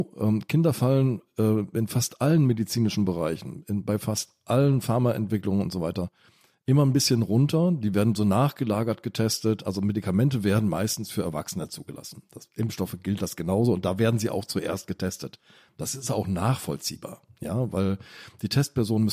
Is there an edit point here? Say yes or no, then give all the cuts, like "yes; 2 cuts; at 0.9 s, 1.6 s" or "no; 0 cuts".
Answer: no; 0 cuts